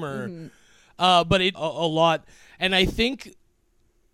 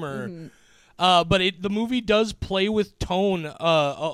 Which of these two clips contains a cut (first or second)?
first